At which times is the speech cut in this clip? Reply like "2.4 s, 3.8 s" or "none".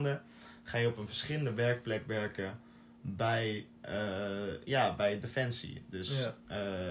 none